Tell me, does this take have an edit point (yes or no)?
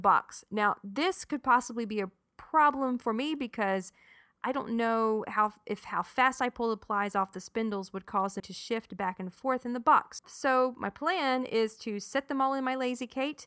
yes